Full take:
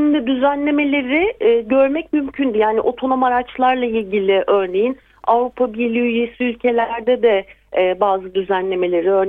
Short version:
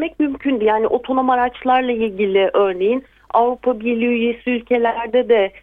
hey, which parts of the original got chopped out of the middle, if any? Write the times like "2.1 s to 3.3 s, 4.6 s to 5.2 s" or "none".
none

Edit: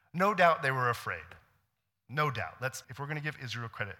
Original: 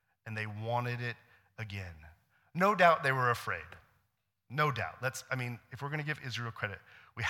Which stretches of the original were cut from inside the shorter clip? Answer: 5.3 s to 5.7 s

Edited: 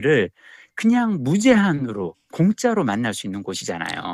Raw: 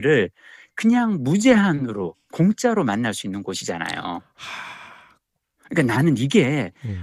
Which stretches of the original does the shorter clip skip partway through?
none

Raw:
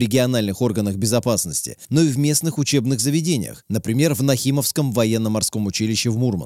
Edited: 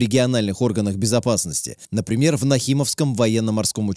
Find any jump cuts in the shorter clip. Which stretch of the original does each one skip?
1.9 s to 3.6 s

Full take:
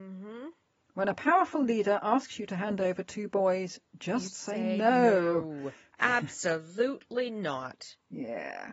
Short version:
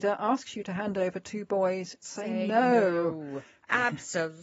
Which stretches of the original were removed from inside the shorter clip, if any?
3.9 s to 4.3 s

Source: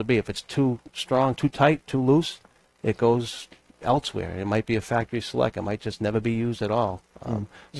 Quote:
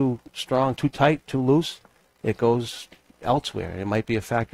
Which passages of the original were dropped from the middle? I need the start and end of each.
none

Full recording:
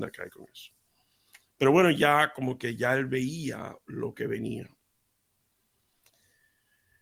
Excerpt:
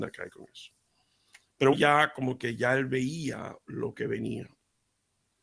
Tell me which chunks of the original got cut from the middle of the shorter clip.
1.7 s to 1.9 s

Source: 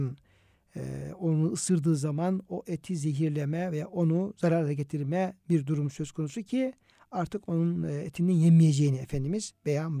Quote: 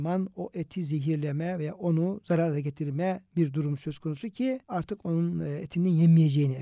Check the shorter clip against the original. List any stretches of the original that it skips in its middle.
6.8 s to 7.1 s

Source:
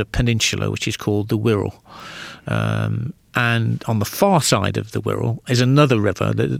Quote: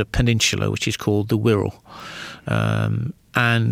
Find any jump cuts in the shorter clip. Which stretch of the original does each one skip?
none

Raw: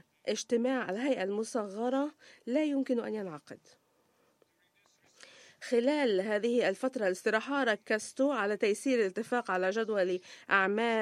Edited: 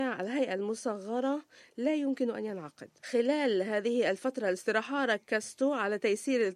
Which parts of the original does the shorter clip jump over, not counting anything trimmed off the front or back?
3.7 s to 5.6 s

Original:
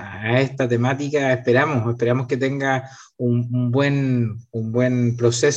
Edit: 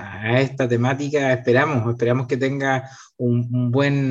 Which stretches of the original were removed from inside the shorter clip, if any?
none

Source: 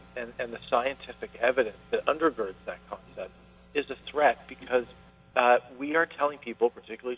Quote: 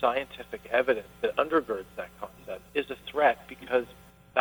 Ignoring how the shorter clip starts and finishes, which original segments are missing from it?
3.4 s to 3.7 s

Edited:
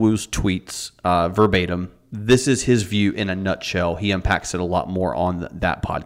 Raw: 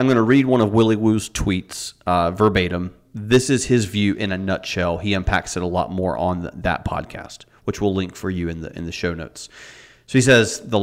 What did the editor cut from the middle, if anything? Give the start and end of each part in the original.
none

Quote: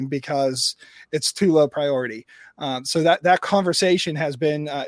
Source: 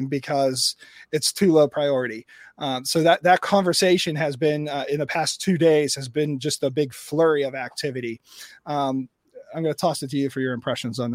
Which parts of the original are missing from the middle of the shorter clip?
none

